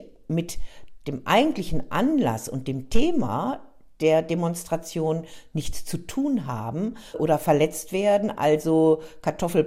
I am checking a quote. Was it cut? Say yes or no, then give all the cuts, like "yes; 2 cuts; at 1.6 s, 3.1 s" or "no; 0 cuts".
yes; 1 cut; at 7.1 s